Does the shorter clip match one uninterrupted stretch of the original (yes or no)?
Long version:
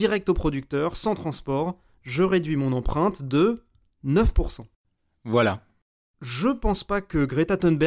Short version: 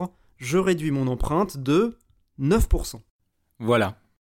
yes